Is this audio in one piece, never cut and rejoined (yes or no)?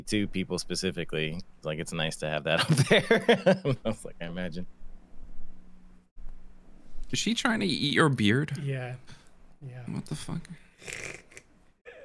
yes